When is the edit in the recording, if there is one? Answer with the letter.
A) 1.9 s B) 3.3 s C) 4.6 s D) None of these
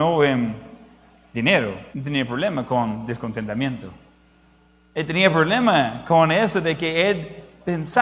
A